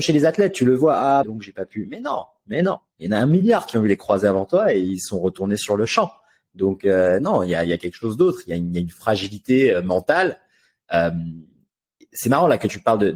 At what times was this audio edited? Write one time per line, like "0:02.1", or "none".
0:01.2